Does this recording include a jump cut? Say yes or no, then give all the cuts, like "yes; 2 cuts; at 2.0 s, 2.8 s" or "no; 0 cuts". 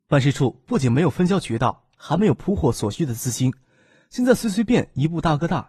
yes; 1 cut; at 4.7 s